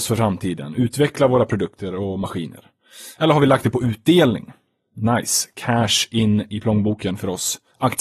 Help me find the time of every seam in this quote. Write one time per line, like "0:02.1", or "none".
none